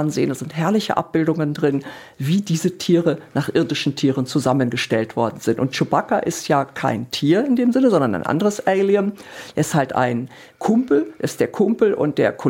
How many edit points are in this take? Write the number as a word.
zero